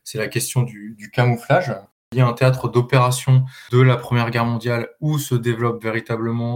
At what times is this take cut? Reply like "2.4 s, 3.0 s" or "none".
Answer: none